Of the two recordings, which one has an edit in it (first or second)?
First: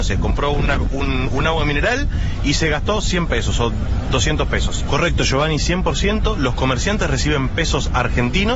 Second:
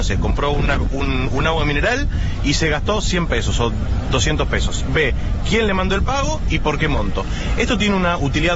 first